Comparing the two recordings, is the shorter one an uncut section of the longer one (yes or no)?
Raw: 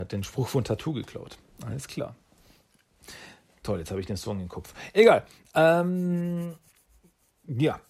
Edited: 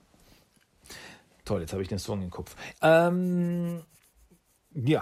no